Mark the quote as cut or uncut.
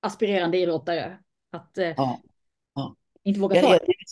uncut